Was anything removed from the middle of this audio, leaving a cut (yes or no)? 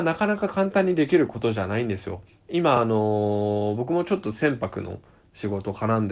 no